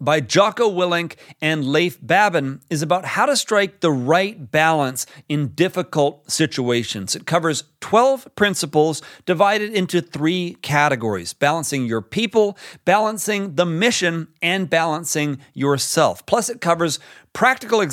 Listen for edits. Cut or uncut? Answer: uncut